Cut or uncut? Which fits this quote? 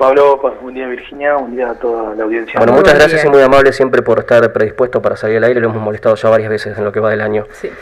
uncut